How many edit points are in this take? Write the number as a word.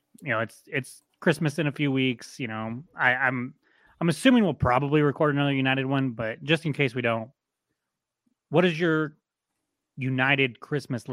zero